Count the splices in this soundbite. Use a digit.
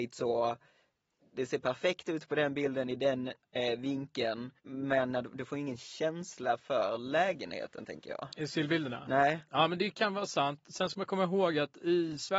1